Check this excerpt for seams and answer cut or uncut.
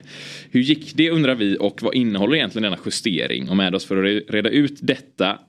uncut